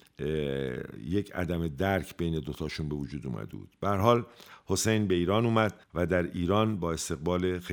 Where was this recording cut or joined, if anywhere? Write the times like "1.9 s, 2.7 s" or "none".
5.8 s

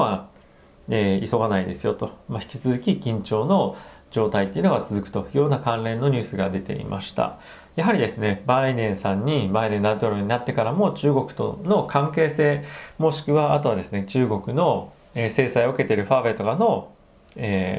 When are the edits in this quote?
none

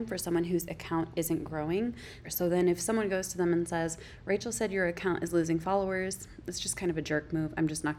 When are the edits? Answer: 2.2 s

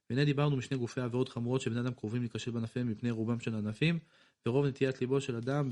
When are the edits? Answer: none

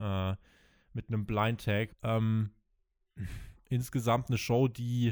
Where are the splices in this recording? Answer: 1.9 s, 3.5 s

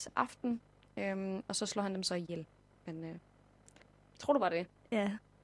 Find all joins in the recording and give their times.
2.7 s

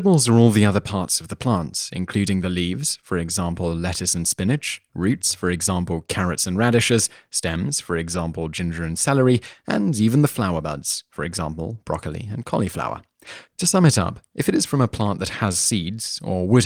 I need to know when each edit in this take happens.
none

